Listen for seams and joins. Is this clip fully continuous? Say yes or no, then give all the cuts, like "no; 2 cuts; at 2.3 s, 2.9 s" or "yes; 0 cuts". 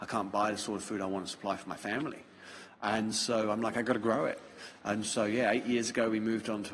yes; 0 cuts